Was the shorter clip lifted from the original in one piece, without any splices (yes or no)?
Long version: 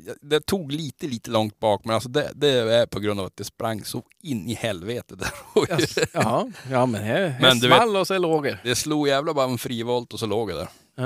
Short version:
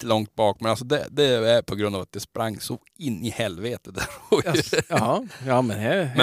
yes